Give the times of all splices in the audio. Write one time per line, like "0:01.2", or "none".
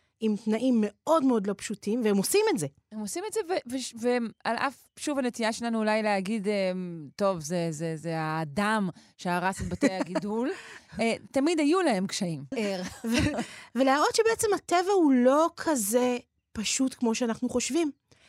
0:11.3
0:12.5